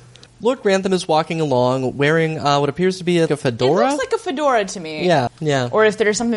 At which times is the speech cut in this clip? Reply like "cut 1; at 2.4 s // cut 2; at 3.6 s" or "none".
cut 1; at 3.3 s // cut 2; at 5.3 s